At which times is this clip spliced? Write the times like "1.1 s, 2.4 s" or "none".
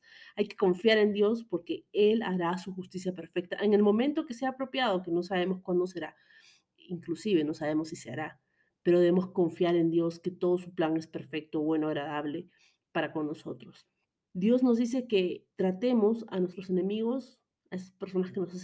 14.3 s, 15.5 s

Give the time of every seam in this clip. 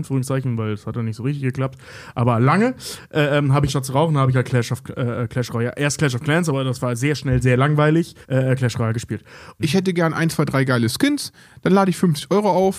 3.7 s, 8.2 s, 9.6 s

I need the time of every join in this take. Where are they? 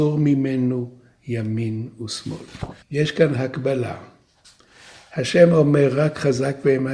2.8 s

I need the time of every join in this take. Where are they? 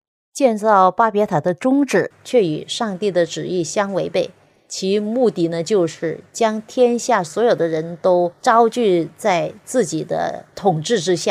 none

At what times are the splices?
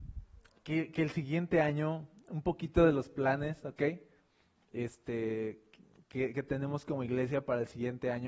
none

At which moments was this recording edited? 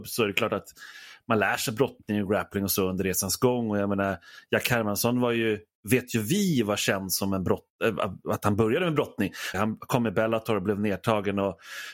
9.5 s

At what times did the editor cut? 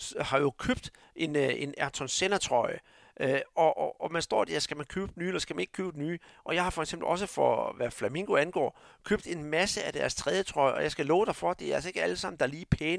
none

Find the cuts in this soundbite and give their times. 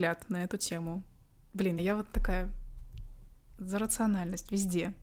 1.8 s

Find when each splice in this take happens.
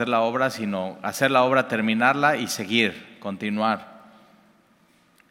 none

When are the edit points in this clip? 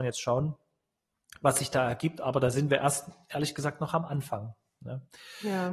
none

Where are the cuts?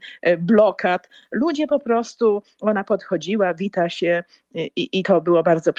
none

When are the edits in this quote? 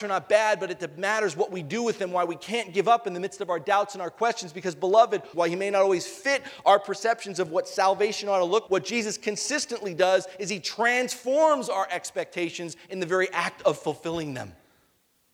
5.3 s, 8.7 s

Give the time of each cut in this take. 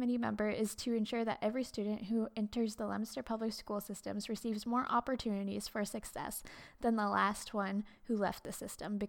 none

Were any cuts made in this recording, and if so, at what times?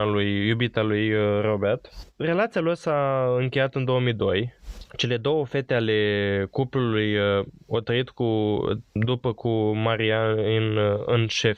none

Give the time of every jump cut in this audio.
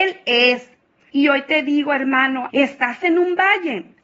1.1 s, 2.5 s

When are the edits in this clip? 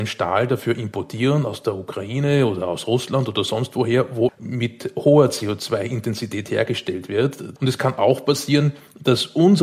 4.3 s, 7.6 s

